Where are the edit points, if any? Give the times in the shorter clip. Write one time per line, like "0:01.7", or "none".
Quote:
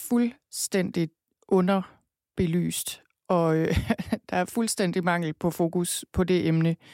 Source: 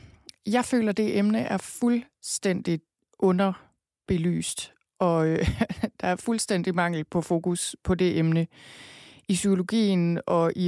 none